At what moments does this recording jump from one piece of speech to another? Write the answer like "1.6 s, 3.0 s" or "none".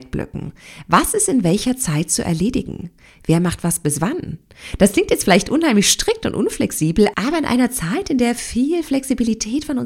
none